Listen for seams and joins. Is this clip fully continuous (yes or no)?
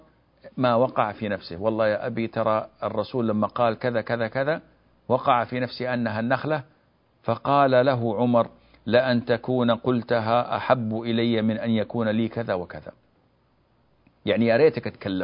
yes